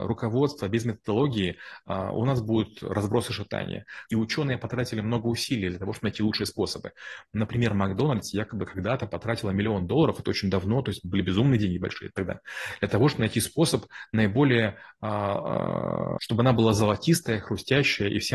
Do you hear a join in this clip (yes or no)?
yes